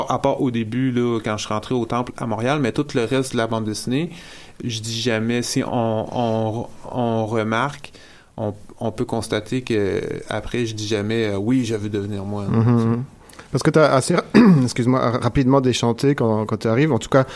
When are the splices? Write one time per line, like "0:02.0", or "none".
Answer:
none